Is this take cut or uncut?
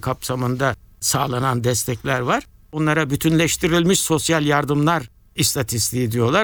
uncut